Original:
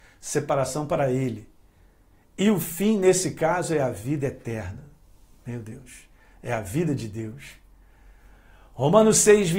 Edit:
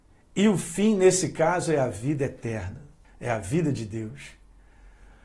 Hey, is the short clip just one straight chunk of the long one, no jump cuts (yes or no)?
no